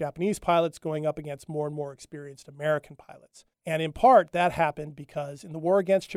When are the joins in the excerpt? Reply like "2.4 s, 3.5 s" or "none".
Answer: 3.5 s